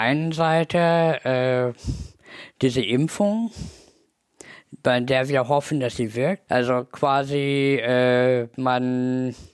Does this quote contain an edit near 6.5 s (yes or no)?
yes